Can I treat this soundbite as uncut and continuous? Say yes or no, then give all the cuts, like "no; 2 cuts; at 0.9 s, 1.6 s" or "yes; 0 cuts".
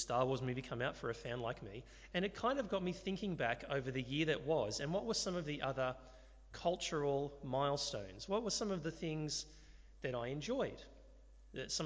yes; 0 cuts